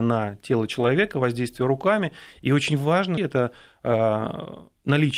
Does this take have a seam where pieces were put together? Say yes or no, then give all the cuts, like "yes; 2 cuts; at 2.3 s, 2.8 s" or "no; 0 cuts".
yes; 1 cut; at 3.2 s